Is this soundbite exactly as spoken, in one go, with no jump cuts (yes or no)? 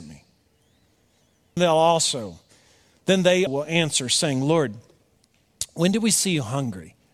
no